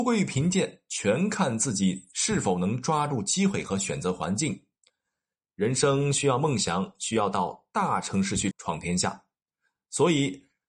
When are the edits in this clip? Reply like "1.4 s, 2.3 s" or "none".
5.4 s, 8.5 s